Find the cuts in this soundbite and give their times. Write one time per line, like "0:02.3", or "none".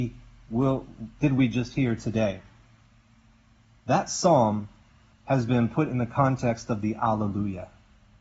none